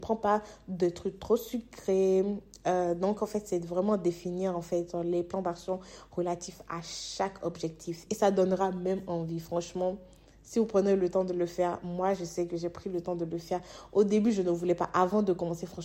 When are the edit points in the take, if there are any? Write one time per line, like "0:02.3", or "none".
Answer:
0:08.1